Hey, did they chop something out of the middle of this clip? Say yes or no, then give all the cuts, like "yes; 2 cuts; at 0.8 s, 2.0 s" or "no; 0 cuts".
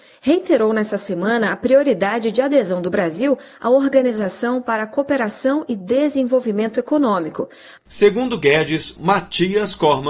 yes; 2 cuts; at 7.8 s, 9.0 s